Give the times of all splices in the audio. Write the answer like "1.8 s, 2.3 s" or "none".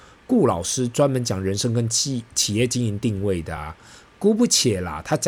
none